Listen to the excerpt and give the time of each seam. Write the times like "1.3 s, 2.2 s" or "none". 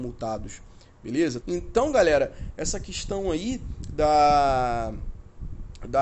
1.4 s